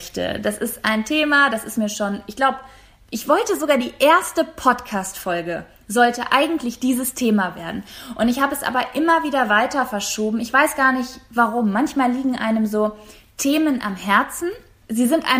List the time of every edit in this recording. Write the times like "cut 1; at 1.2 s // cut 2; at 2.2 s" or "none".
none